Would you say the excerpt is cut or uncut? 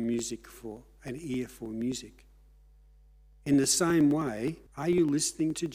cut